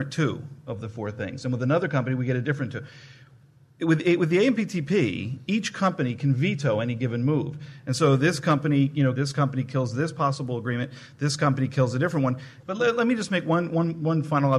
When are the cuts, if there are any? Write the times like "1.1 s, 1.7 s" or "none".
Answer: 9.1 s, 12.6 s